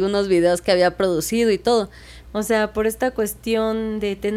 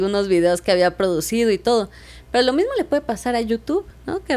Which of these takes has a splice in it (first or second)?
first